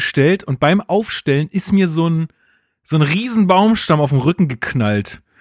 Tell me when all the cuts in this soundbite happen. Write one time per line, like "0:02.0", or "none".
none